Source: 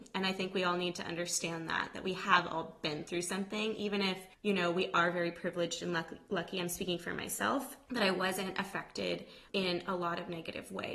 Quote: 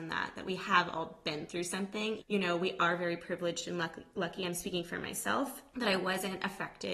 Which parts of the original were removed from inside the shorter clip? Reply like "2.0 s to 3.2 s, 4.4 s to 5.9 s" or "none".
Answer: 3.8 s to 4.3 s